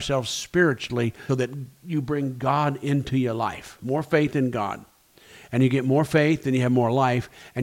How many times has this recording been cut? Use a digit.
1